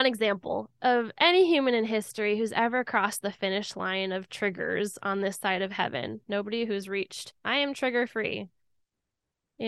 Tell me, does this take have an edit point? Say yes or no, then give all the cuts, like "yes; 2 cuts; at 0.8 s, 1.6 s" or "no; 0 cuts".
yes; 1 cut; at 7.4 s